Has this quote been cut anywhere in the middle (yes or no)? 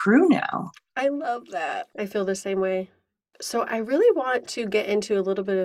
no